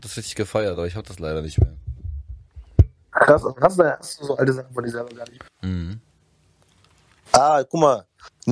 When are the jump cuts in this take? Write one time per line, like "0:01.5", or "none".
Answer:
0:05.5

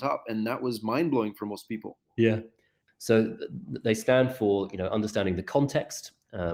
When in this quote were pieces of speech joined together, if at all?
0:02.9

